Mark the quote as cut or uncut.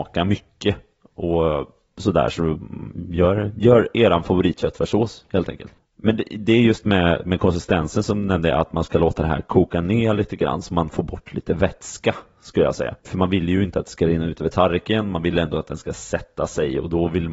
uncut